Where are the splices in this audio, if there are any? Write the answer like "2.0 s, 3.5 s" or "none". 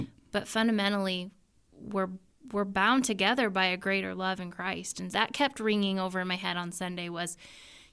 5.1 s